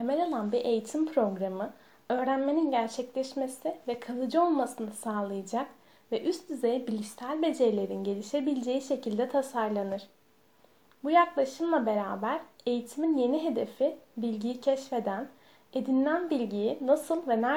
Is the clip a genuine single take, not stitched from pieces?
no; 1 cut; at 10.9 s

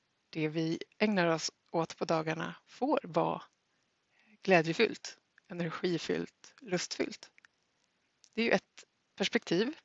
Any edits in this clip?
no; 0 cuts

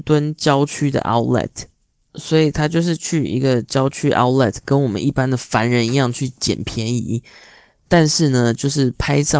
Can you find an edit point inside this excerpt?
no; 0 cuts

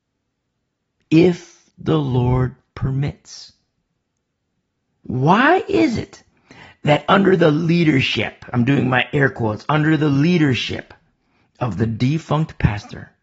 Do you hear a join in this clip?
yes; 1 cut; at 5.0 s

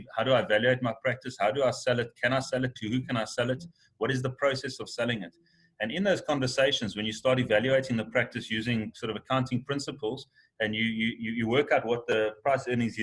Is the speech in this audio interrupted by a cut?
no; 0 cuts

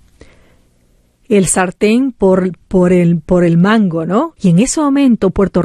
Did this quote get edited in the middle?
yes; 1 cut; at 4.4 s

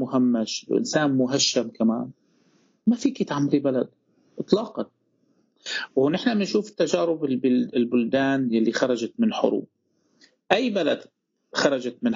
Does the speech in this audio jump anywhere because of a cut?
no; 0 cuts

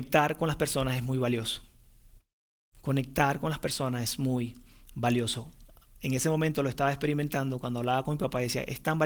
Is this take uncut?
yes; 0 cuts

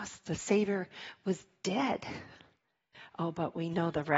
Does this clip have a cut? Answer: no; 0 cuts

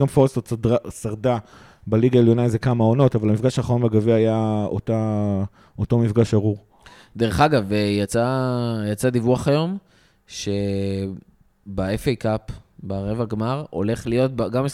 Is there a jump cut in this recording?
no; 0 cuts

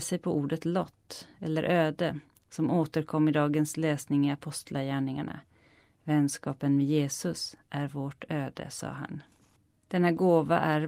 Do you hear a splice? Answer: no; 0 cuts

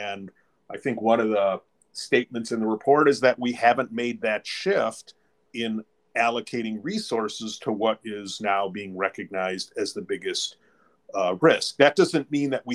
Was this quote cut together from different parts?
yes; 1 cut; at 5.4 s

